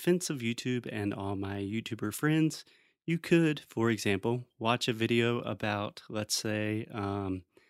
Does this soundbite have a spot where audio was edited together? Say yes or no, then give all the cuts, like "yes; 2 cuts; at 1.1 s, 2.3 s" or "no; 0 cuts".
no; 0 cuts